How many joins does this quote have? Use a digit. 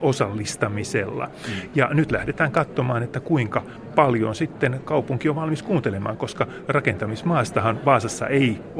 0